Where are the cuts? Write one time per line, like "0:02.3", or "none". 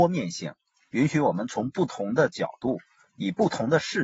none